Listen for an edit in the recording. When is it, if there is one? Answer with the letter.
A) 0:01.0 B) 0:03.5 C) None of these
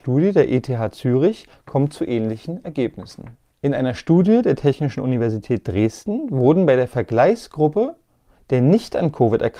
B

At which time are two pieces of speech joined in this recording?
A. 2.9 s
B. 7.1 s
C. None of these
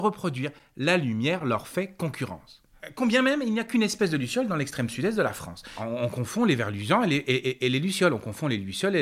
C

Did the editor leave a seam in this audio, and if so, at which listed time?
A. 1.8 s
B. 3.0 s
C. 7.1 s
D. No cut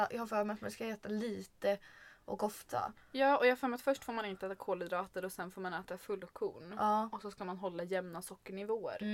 D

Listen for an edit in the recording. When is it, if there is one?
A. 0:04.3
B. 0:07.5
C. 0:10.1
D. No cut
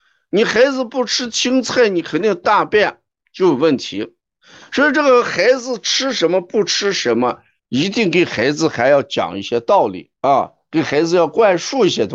C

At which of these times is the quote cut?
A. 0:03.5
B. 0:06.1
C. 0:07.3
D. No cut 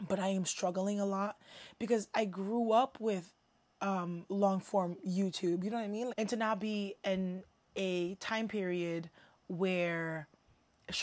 B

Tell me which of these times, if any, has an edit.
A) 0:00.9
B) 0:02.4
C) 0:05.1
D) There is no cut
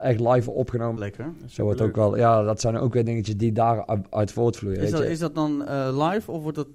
A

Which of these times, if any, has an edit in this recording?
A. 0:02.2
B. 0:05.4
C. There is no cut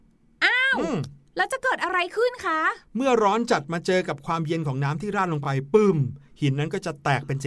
C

